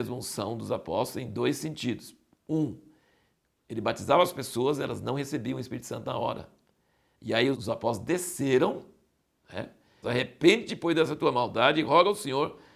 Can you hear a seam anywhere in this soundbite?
yes; 2 cuts; at 7.5 s, 10.0 s

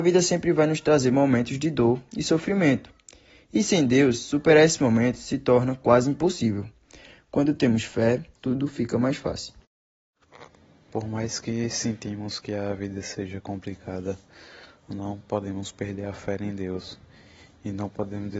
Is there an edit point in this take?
yes; 1 cut; at 8.4 s

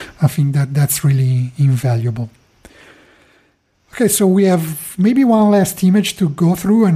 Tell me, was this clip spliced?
no; 0 cuts

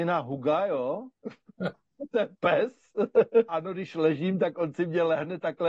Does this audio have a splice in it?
yes; 1 cut; at 3.5 s

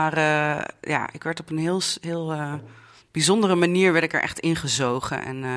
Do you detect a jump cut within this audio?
no; 0 cuts

